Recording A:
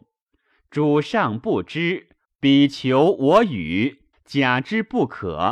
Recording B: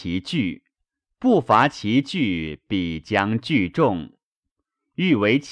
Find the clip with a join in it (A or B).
A